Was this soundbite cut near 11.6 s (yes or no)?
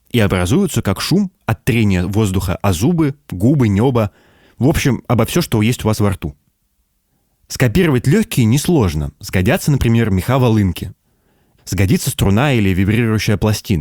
yes